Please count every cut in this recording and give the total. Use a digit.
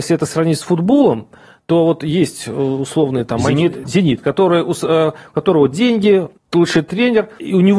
2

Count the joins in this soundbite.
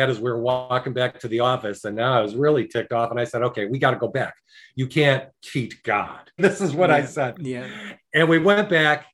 1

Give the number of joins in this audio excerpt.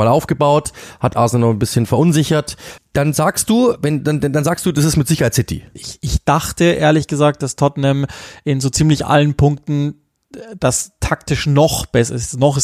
2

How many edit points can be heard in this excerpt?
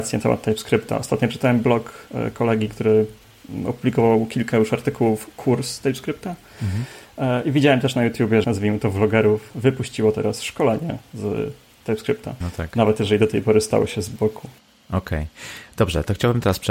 2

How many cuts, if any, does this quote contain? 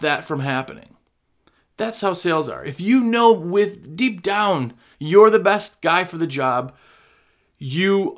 1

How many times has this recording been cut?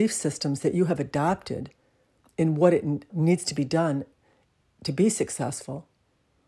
1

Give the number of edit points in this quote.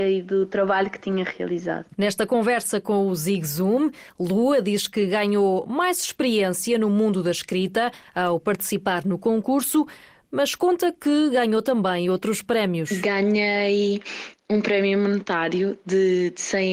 0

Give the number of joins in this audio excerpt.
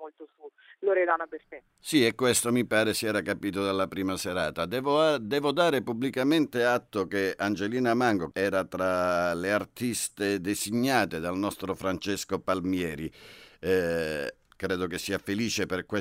3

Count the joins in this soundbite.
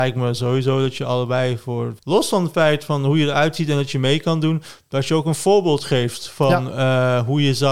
1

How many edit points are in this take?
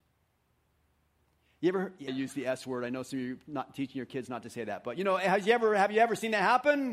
1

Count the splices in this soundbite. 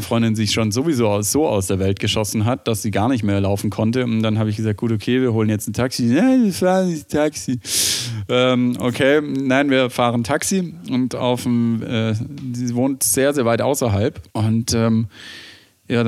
1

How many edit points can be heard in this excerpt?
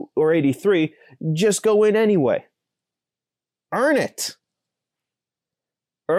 0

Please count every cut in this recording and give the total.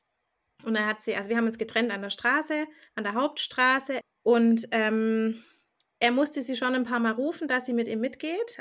1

